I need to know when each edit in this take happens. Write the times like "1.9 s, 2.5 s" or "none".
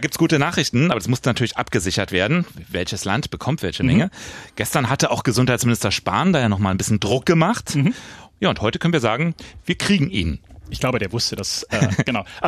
none

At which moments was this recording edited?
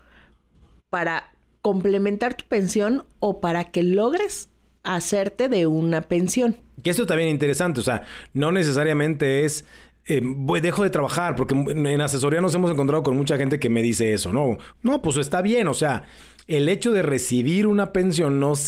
14.7 s

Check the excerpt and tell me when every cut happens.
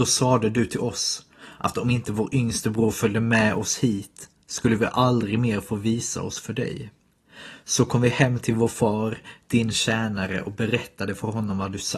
none

